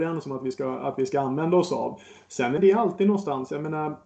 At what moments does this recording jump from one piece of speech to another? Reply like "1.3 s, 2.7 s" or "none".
2.6 s